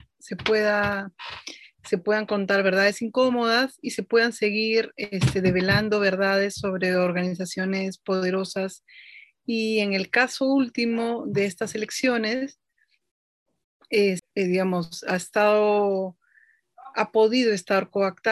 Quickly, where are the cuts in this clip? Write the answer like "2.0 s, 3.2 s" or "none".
14.2 s